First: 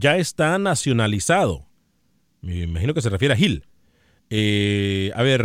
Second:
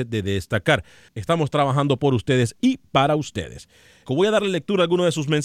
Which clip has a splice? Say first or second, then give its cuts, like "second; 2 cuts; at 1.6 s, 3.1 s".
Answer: second; 2 cuts; at 1.1 s, 4.1 s